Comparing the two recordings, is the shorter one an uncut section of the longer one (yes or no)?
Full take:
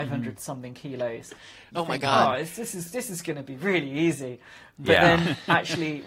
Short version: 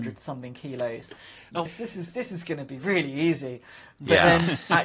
no